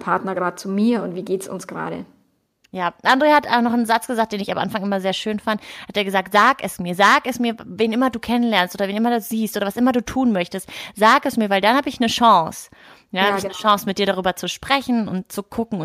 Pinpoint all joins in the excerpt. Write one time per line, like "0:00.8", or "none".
none